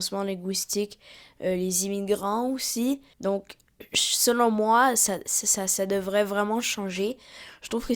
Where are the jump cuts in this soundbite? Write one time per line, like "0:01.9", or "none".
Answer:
0:03.1